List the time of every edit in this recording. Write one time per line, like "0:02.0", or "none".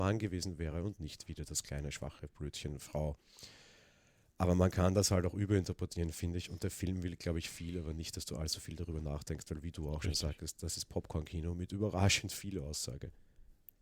none